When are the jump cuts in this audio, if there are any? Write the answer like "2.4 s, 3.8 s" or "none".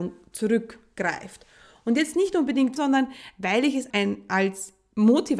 2.8 s, 3.9 s